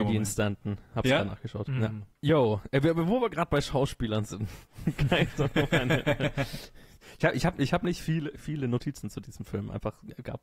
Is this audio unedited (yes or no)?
yes